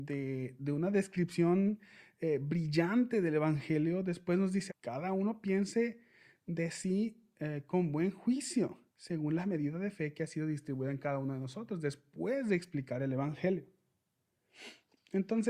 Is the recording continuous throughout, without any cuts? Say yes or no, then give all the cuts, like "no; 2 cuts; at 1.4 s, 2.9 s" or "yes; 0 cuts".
no; 2 cuts; at 4.7 s, 8.9 s